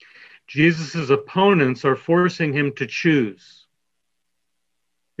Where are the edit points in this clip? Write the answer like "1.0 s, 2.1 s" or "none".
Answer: none

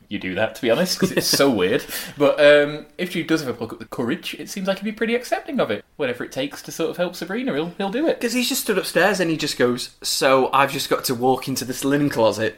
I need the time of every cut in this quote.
5.8 s

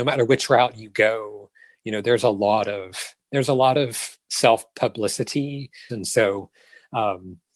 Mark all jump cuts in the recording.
5.9 s

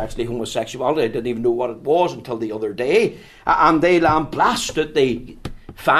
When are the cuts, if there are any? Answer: none

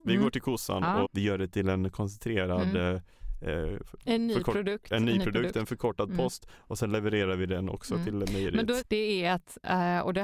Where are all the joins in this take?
1.0 s, 8.8 s

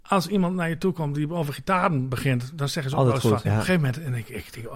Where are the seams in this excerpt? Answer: 3.4 s

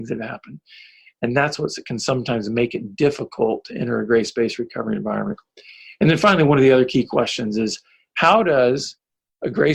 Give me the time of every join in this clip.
none

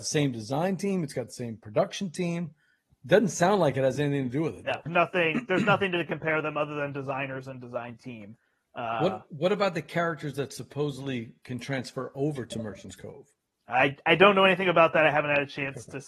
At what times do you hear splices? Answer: 4.9 s

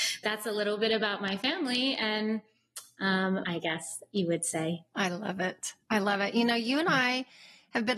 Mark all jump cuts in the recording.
3.4 s

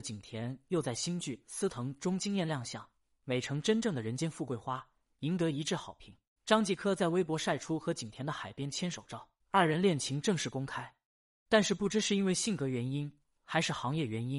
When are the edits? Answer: 6.4 s, 9.4 s

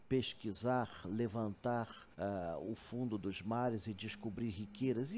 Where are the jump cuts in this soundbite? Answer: 2.1 s

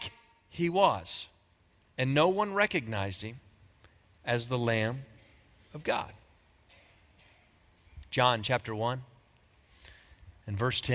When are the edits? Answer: none

